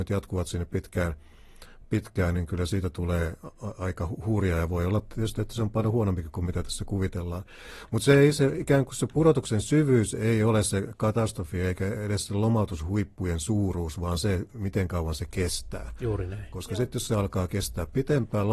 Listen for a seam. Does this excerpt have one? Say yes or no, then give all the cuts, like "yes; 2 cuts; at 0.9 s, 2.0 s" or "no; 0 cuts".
no; 0 cuts